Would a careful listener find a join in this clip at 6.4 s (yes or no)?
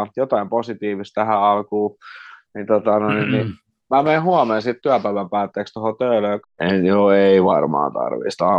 yes